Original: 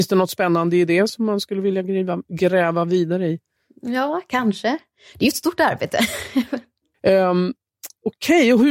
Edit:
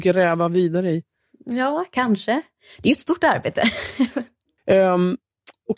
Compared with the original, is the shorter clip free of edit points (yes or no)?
yes